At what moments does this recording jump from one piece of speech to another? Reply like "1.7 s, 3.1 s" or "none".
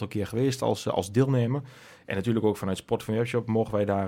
none